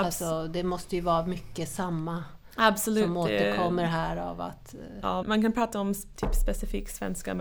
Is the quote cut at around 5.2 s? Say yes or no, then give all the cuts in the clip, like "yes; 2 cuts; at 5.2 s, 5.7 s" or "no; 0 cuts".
yes; 1 cut; at 5.2 s